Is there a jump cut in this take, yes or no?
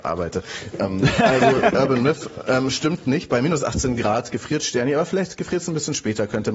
no